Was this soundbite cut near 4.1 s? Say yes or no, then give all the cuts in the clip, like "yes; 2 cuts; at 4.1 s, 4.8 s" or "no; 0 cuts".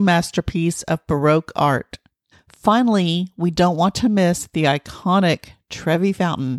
no; 1 cut; at 2.3 s